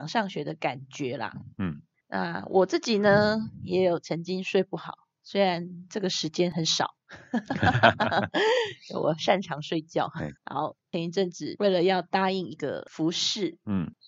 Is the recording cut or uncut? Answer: cut